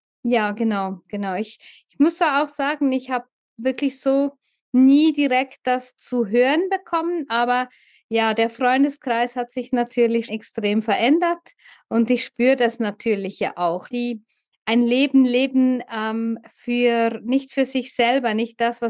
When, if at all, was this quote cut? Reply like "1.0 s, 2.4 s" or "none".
10.3 s, 13.9 s